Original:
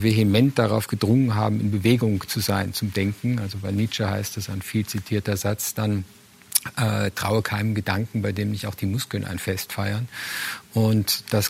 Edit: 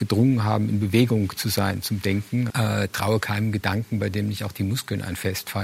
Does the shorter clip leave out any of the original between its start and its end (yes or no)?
yes